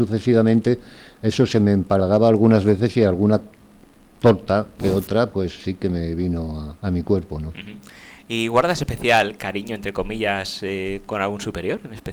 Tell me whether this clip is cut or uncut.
cut